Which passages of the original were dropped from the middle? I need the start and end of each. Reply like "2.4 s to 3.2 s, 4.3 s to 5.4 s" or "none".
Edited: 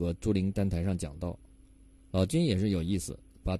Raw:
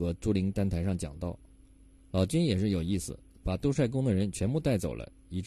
none